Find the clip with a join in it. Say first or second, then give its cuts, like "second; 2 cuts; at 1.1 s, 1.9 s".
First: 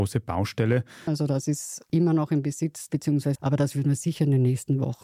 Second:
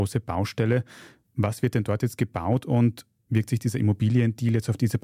first; 2 cuts; at 1.1 s, 3.4 s